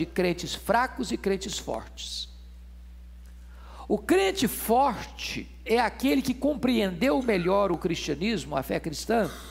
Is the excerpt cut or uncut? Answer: uncut